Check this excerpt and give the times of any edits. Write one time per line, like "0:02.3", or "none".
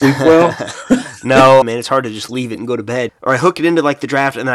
0:01.6
0:03.1